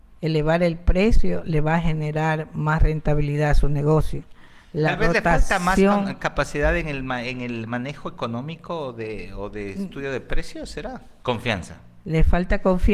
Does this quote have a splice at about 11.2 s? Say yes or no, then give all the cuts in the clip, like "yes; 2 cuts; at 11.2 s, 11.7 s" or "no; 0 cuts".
yes; 1 cut; at 11.2 s